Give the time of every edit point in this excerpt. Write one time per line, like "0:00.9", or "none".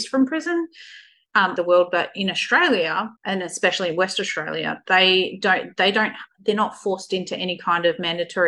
0:01.6
0:03.2